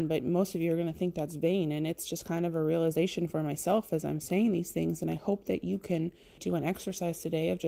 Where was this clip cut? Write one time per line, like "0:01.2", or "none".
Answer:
0:06.4